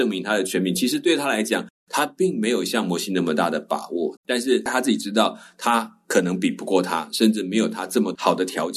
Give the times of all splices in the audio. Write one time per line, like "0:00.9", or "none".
0:04.2